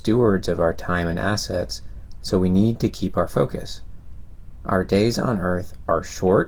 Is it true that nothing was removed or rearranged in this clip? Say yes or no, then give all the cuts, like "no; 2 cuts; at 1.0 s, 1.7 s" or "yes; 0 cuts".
yes; 0 cuts